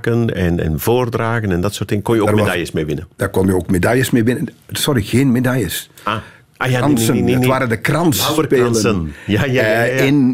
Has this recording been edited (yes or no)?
no